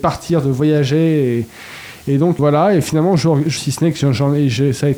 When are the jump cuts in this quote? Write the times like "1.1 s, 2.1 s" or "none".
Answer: 2.4 s, 3.6 s